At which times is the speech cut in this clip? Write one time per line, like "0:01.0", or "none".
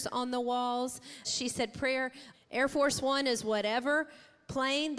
0:01.2
0:02.3